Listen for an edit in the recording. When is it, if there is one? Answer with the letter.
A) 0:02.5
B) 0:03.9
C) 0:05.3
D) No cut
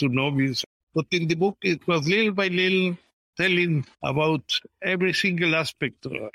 B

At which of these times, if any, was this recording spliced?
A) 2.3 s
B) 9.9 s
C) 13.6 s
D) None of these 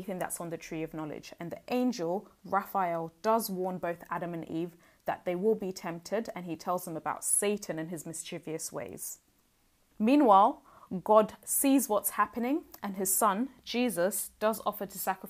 B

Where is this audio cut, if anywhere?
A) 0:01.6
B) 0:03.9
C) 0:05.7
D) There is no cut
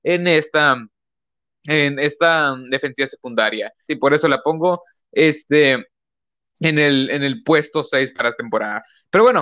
B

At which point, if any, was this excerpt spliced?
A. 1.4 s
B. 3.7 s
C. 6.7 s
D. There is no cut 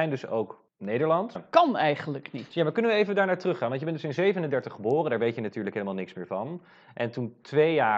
A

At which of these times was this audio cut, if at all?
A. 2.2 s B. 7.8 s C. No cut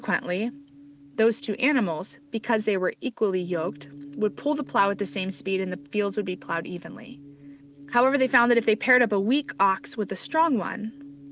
C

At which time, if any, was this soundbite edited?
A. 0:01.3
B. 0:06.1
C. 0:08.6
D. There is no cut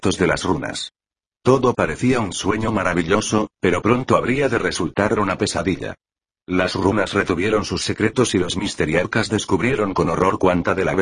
D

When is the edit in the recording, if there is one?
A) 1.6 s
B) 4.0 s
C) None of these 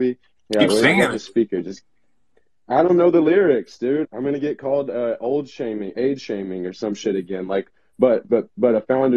B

